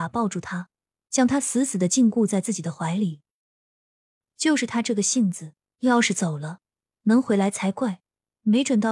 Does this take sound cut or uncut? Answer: uncut